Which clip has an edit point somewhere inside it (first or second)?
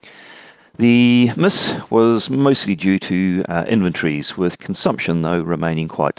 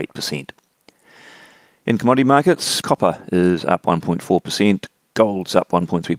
second